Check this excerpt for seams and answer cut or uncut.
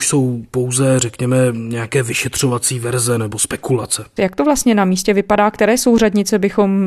cut